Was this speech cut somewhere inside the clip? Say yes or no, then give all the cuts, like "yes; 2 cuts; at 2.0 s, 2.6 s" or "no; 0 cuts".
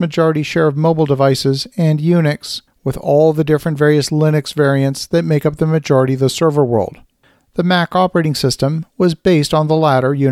no; 0 cuts